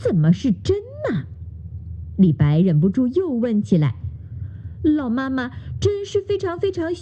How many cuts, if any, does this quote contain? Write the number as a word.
zero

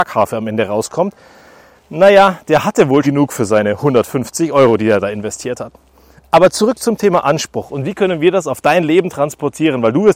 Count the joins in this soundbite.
one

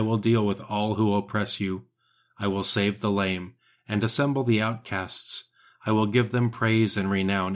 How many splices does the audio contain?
zero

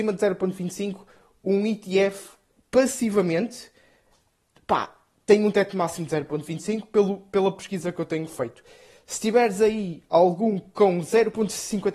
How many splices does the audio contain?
zero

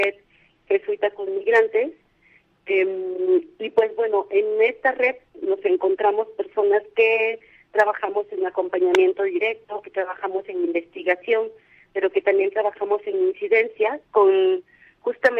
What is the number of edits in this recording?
zero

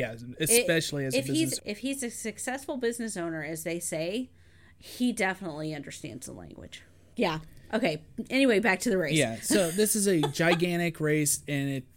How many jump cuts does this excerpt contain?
one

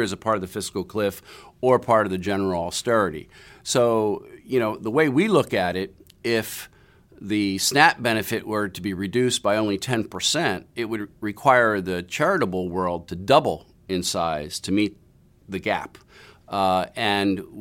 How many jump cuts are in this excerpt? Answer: zero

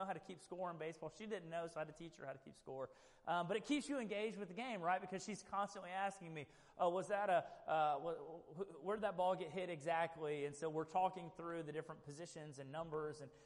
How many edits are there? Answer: zero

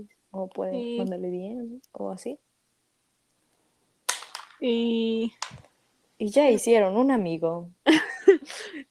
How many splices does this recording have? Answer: zero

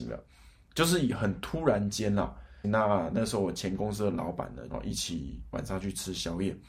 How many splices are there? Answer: two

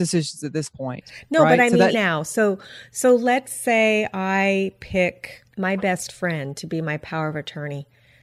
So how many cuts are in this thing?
two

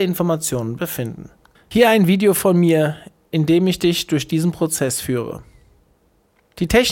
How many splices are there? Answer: one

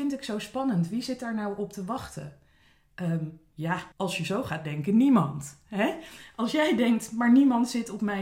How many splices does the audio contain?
one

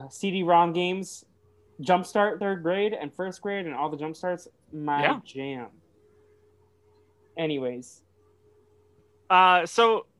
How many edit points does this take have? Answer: zero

